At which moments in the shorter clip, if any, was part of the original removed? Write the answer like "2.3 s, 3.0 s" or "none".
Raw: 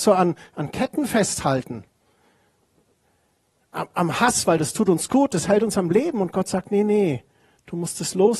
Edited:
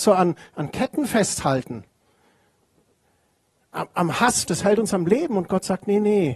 4.4 s